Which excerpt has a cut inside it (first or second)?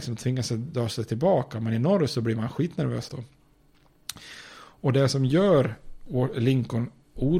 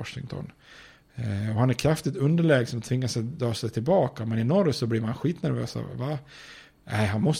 first